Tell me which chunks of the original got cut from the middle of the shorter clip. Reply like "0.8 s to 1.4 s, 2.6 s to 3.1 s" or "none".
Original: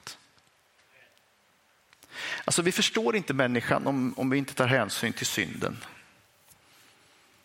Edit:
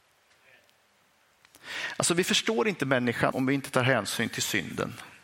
3.8 s to 4.1 s